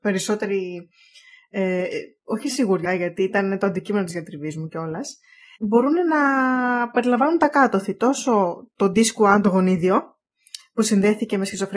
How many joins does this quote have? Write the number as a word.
two